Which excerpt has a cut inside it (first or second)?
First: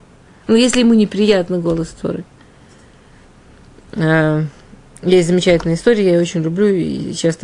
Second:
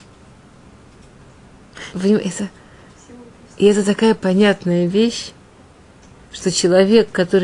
second